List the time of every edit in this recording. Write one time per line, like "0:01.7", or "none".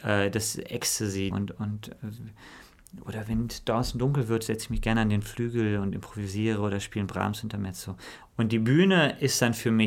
0:01.3
0:08.2